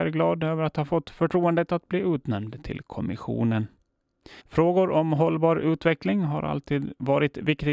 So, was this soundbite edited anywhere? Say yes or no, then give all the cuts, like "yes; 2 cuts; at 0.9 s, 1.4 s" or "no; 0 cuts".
yes; 1 cut; at 4.4 s